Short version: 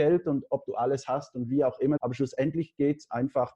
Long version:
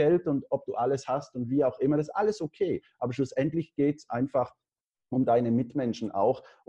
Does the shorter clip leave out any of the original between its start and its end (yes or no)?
yes